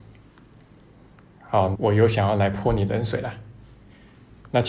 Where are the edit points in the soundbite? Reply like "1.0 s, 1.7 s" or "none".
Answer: 1.7 s